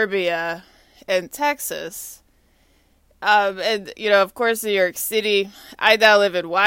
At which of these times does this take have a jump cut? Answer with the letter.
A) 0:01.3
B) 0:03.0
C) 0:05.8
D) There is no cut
D